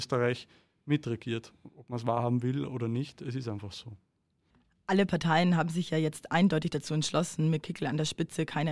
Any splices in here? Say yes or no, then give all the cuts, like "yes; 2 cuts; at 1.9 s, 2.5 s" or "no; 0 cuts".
no; 0 cuts